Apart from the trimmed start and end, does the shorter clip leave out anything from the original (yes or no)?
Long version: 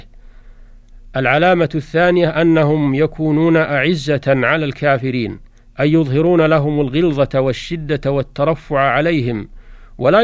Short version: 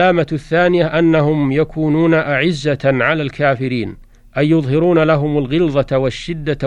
no